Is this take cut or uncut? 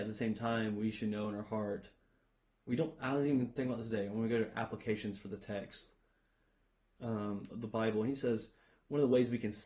cut